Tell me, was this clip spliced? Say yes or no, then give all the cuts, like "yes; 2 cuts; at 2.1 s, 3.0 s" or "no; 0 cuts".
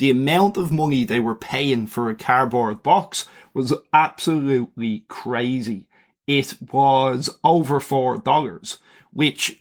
no; 0 cuts